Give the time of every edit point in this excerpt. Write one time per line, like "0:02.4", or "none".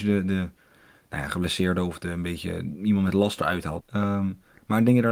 0:03.8